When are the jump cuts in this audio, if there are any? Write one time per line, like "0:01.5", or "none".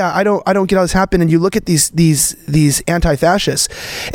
none